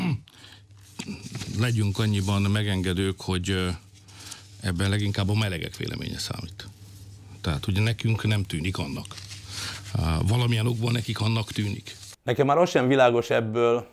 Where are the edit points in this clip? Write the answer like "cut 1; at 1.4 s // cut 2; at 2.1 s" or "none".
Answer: none